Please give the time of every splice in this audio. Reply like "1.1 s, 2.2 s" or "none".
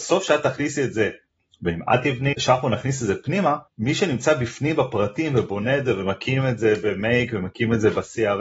2.3 s, 3.7 s

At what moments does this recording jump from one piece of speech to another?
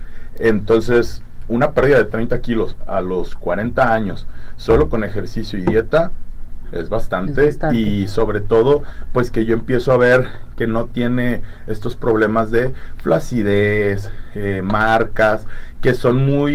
6.6 s

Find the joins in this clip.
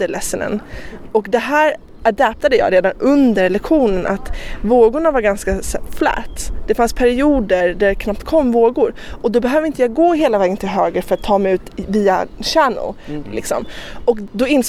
13.2 s

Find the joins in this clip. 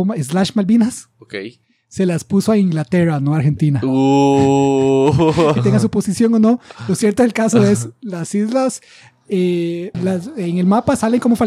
5.6 s, 9.9 s

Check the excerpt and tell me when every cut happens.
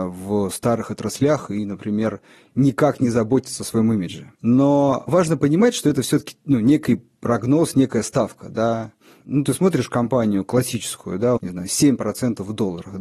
4.3 s, 9.2 s, 11.4 s

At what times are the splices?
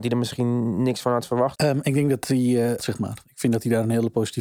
1.6 s, 2.8 s

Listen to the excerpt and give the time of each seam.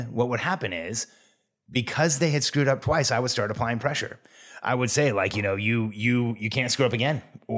none

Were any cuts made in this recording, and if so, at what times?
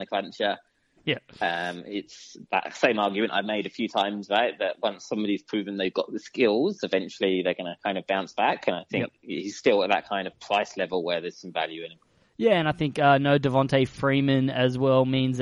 none

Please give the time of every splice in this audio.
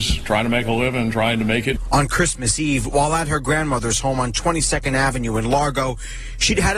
none

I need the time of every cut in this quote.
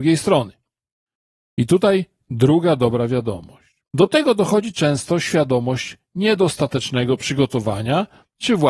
1.5 s, 3.9 s

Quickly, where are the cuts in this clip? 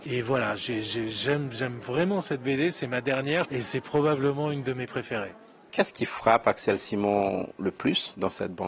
3.4 s

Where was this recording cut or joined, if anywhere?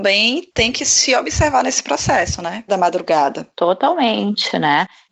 2.7 s

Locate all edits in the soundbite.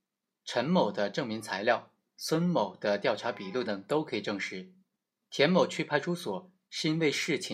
3.7 s

